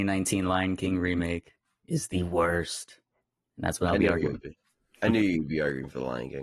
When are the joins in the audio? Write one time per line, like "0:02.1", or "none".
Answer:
none